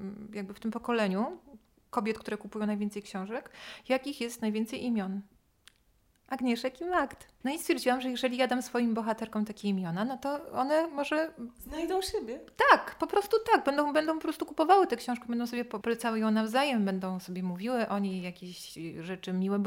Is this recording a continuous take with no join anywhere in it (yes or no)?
no